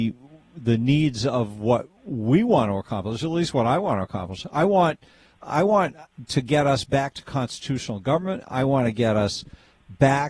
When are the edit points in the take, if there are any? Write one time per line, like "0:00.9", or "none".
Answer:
none